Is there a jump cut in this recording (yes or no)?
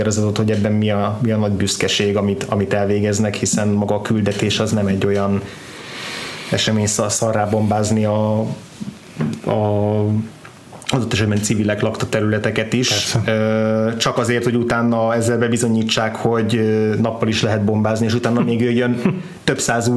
no